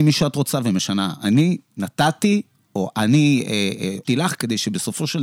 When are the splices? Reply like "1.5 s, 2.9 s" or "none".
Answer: 4.0 s